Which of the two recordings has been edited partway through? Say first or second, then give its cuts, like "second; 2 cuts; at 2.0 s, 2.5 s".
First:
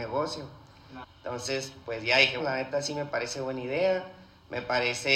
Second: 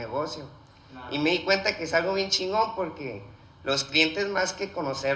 first; 2 cuts; at 1.0 s, 2.4 s